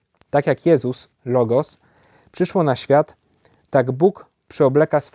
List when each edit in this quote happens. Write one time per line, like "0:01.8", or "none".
0:01.1